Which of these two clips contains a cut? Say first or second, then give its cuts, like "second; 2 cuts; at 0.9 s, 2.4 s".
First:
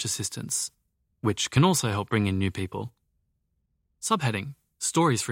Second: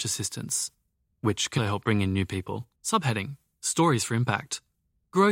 second; 2 cuts; at 1.6 s, 2.7 s